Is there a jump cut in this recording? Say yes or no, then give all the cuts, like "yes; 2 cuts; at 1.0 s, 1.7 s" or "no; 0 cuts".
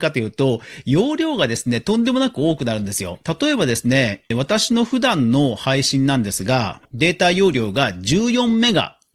no; 0 cuts